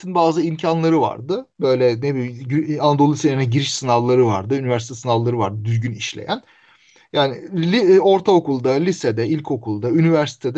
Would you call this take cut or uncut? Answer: uncut